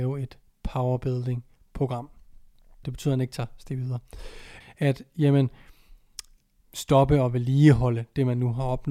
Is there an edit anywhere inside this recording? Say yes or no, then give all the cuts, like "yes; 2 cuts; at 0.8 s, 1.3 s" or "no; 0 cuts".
yes; 3 cuts; at 2.8 s, 4.6 s, 6.6 s